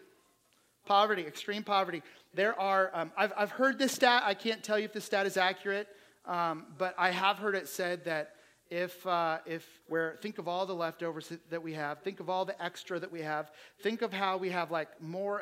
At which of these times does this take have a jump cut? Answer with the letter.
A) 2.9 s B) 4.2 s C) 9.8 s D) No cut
C